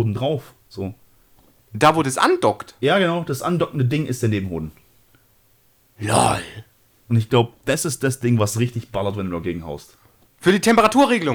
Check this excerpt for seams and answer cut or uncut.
cut